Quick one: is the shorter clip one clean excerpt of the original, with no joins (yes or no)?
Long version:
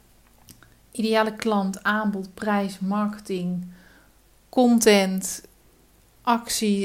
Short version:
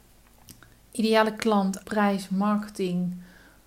no